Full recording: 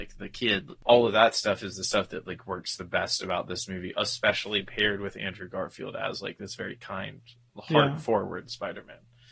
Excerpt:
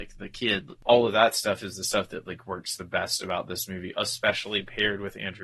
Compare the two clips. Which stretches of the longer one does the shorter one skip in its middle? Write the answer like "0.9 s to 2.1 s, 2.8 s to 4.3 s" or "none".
none